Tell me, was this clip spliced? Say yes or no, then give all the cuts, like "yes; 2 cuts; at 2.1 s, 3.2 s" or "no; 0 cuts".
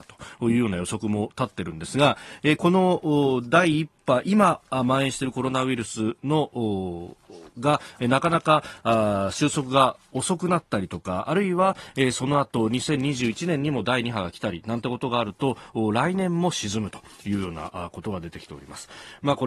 yes; 1 cut; at 7.5 s